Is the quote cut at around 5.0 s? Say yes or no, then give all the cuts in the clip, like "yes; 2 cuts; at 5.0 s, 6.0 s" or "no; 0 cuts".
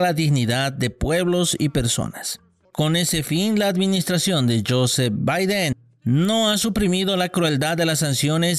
no; 1 cut; at 2.6 s